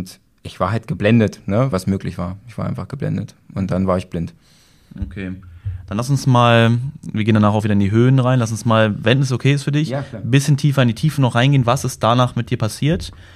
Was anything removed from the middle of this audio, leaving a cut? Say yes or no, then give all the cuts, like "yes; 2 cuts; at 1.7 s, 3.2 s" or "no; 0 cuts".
yes; 1 cut; at 1.7 s